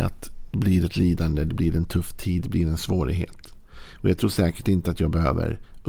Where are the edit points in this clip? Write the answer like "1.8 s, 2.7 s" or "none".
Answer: none